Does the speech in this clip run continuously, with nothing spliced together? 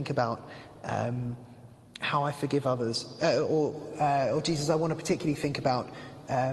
yes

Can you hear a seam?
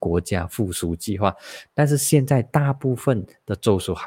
yes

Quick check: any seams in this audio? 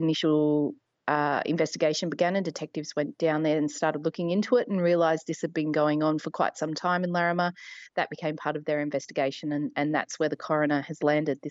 no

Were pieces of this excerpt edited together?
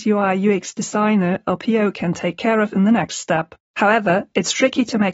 yes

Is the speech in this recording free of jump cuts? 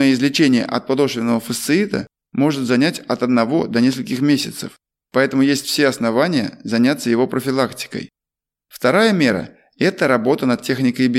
no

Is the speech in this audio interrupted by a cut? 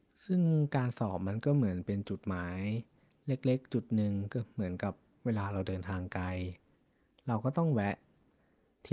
no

